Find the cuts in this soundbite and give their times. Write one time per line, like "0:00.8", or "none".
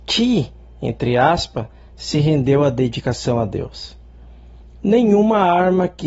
0:04.6